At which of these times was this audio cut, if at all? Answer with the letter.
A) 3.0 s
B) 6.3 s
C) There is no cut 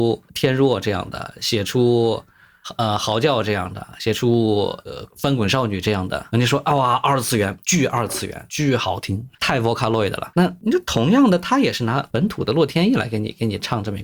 C